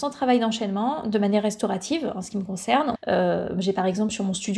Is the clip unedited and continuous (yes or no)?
no